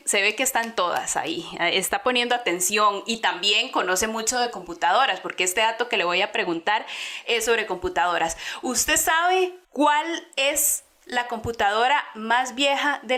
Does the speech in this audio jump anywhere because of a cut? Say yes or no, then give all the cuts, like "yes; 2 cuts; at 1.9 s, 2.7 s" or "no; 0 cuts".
yes; 1 cut; at 9.6 s